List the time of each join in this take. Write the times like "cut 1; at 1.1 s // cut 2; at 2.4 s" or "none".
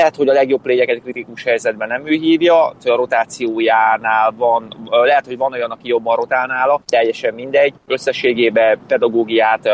cut 1; at 2.8 s